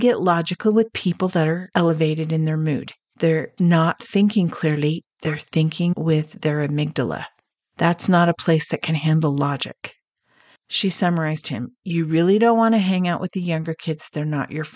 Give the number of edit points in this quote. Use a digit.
2